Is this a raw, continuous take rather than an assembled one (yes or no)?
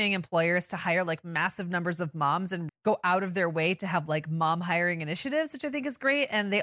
no